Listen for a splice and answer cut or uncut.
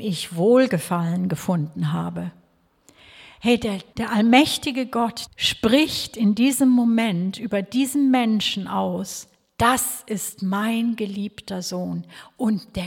cut